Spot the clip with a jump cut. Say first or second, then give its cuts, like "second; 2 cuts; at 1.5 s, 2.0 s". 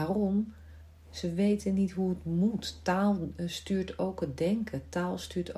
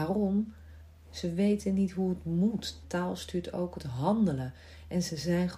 second; 1 cut; at 2.8 s